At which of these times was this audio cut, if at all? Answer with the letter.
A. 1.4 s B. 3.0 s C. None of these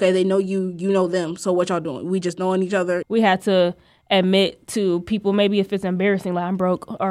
B